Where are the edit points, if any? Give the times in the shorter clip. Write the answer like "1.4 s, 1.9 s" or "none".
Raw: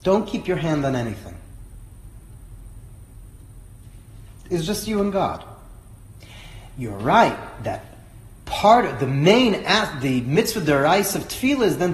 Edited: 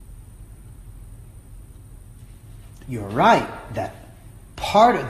2.8 s